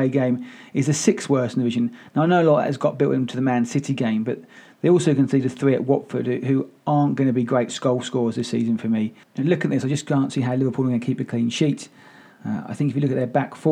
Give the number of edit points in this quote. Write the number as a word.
zero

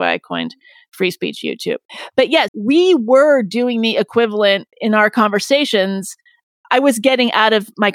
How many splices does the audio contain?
two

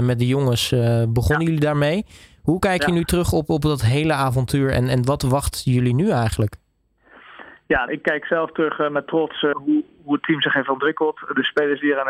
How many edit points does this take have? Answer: two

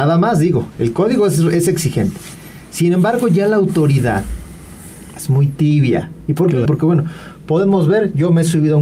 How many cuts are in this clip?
two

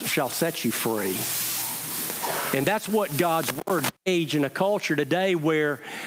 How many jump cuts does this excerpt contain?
one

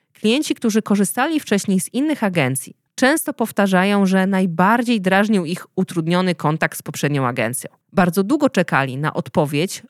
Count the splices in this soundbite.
two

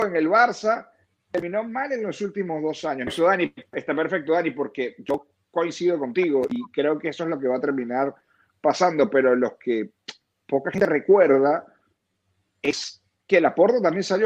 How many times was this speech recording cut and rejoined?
one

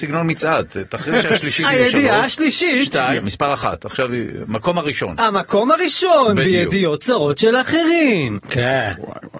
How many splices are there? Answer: two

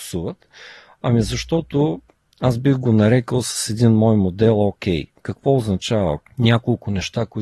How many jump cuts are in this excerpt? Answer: one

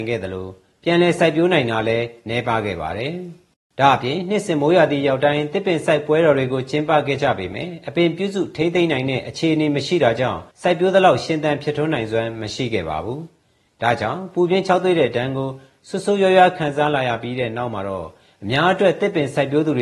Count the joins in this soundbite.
one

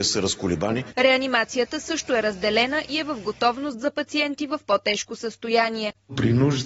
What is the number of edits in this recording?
one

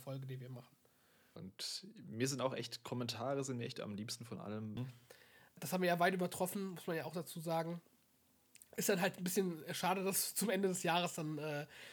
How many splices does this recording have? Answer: two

